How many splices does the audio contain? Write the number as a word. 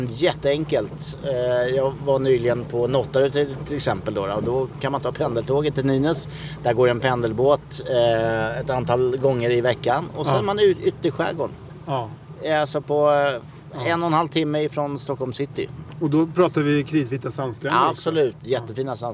zero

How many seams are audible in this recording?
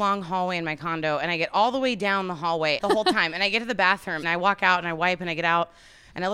two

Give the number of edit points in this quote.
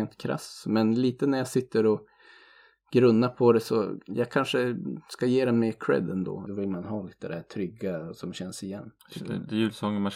two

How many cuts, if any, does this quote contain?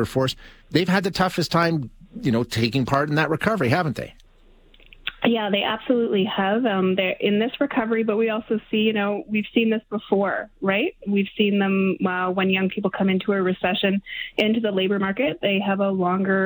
zero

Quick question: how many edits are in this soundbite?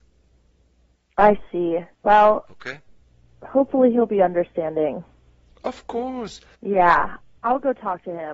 two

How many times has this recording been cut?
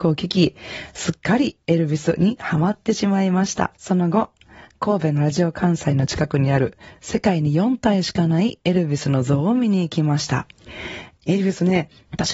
two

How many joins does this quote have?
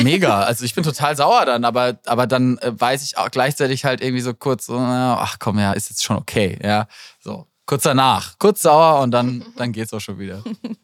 zero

